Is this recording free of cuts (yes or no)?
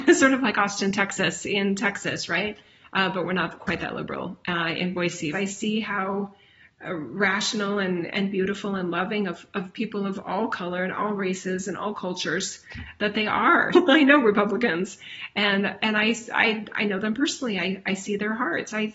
no